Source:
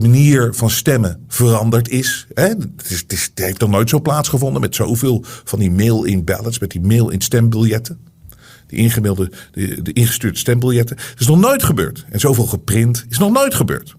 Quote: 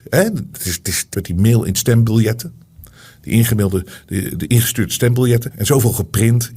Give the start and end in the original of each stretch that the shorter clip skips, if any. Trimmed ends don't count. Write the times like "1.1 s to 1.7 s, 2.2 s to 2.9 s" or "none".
3.4 s to 6.6 s, 11.0 s to 12.0 s